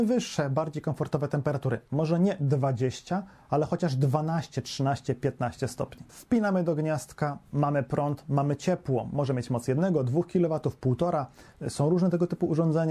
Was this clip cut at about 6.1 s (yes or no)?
yes